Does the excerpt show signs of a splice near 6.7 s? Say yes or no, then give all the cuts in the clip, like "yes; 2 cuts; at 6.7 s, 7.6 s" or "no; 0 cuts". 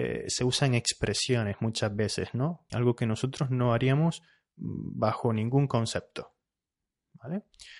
no; 1 cut; at 2.7 s